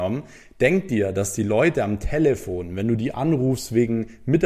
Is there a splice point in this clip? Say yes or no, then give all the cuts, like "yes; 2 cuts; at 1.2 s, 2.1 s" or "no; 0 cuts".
no; 0 cuts